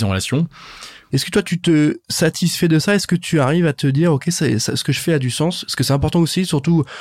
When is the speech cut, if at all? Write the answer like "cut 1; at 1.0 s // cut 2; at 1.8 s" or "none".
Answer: cut 1; at 1.1 s